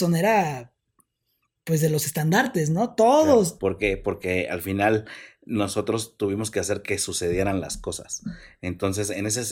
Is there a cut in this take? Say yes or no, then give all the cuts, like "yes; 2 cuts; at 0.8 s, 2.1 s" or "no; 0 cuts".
yes; 1 cut; at 3.6 s